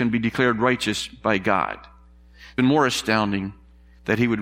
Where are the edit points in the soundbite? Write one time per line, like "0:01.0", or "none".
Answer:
0:02.6